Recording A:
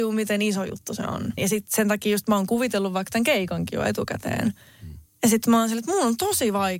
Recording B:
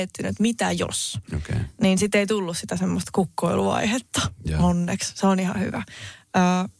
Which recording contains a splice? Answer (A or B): A